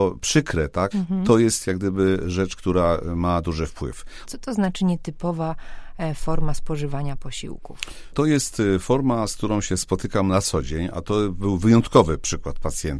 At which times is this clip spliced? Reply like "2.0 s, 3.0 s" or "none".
0.9 s, 4.2 s